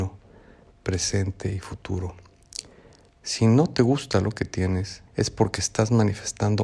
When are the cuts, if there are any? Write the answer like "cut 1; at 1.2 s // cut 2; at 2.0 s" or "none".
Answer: cut 1; at 5.1 s

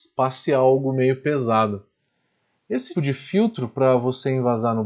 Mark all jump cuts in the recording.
cut 1; at 2.9 s

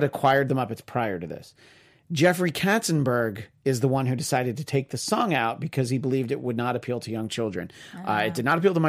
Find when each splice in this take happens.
none

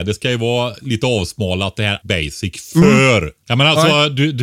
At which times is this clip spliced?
cut 1; at 2.0 s // cut 2; at 3.4 s

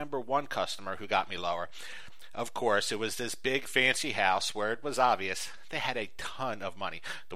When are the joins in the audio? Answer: none

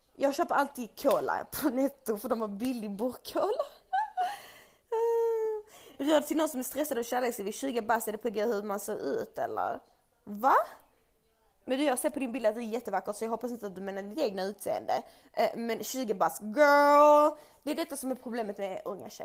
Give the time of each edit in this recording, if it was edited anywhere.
none

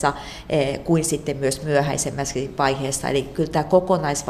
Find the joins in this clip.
none

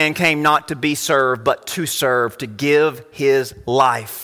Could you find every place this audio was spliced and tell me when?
none

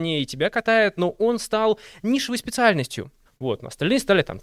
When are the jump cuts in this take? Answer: cut 1; at 3.3 s

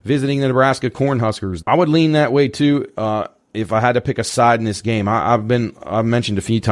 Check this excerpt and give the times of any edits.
cut 1; at 1.6 s

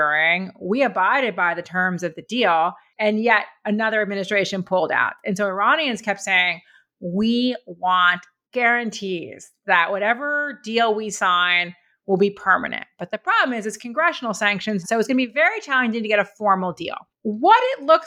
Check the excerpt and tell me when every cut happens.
cut 1; at 14.8 s

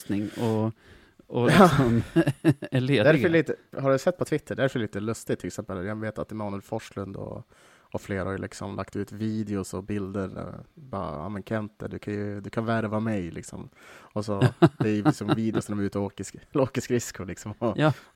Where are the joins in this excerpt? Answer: cut 1; at 3.7 s

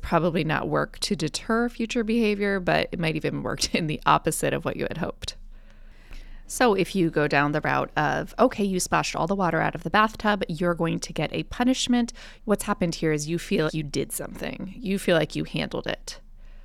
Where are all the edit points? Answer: cut 1; at 6.4 s // cut 2; at 12.4 s // cut 3; at 13.7 s

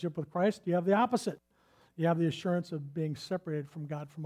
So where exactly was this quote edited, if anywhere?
none

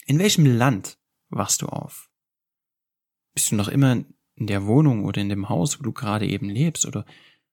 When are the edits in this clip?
none

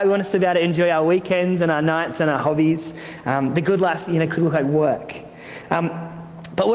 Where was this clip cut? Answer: none

